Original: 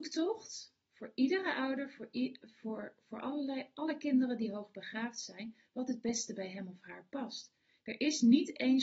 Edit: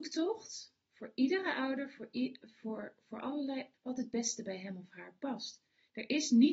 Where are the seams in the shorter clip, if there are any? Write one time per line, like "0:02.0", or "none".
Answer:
0:03.7